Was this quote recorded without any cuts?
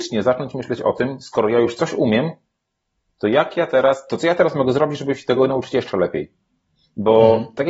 yes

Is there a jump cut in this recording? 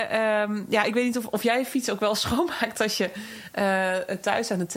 no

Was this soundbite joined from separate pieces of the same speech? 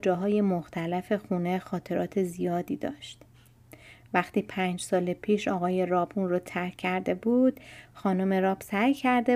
no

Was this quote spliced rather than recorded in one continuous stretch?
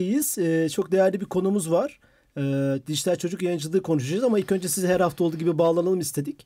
no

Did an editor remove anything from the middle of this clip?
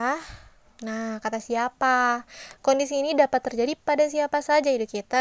yes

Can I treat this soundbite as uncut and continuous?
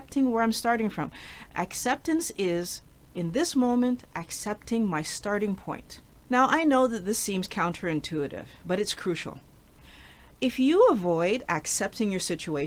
yes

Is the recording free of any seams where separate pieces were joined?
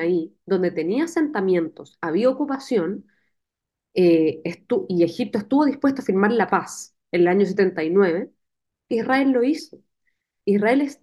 yes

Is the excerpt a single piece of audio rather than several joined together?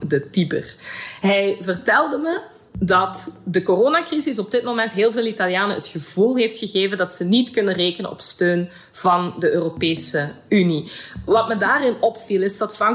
yes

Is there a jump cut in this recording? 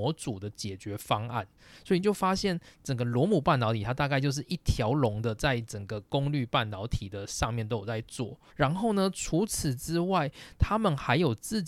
yes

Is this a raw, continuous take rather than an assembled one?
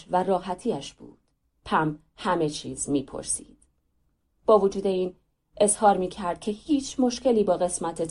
no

